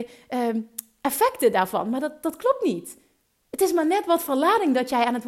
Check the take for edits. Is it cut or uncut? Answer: uncut